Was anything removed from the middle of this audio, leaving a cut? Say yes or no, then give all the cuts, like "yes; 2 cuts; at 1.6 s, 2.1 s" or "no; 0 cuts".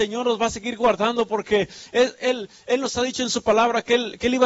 no; 0 cuts